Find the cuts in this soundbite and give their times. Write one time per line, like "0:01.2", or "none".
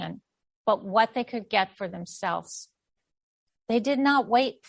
0:03.5